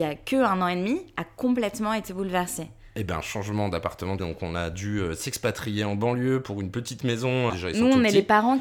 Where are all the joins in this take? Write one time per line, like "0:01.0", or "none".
0:04.2
0:07.5